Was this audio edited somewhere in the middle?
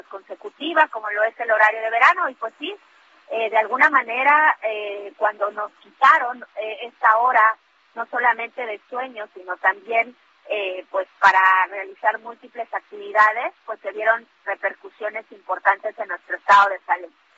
no; 0 cuts

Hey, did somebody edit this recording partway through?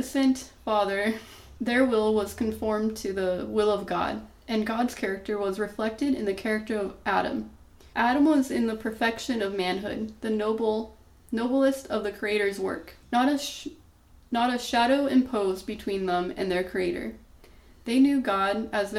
yes; 3 cuts; at 1.6 s, 7.9 s, 13.0 s

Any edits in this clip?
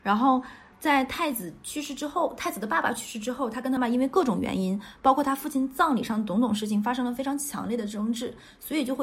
yes; 1 cut; at 3.8 s

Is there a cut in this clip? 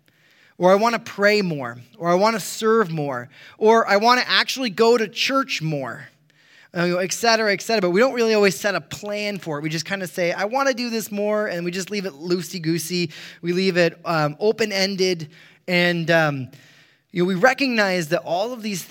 no; 0 cuts

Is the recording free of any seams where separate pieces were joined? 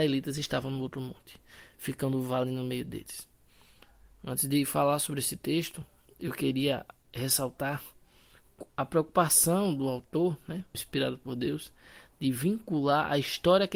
no; 1 cut; at 10.7 s

